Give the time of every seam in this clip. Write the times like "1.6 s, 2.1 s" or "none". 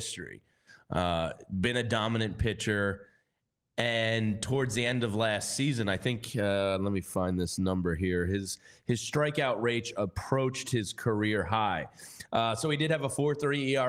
none

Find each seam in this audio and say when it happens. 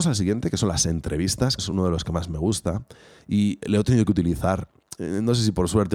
1.6 s

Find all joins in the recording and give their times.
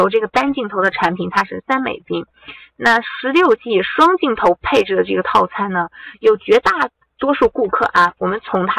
1.6 s, 6.1 s

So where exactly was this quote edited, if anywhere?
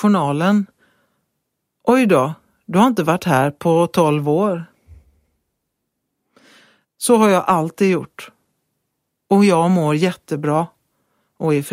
6.8 s

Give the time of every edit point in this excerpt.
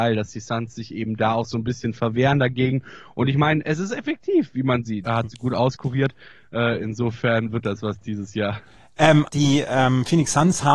5.0 s, 9.3 s

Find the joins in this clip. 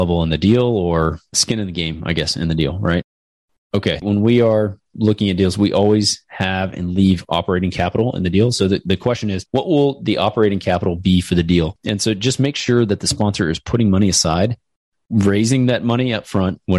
4.0 s

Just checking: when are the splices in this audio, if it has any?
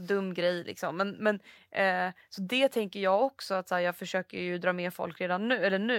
none

